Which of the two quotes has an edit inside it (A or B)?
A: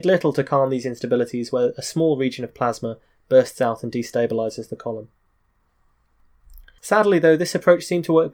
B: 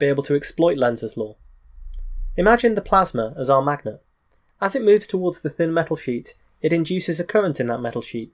A